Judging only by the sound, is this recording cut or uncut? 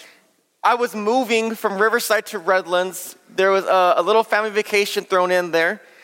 uncut